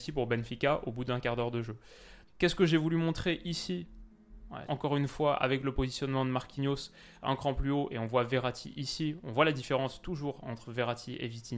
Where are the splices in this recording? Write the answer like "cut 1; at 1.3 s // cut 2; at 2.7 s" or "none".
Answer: cut 1; at 2.3 s // cut 2; at 4.7 s